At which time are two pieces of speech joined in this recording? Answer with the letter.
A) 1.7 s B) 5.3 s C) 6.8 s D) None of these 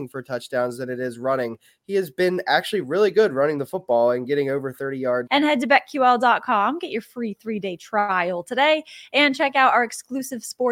B